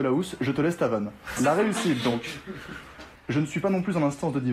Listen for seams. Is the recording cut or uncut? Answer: cut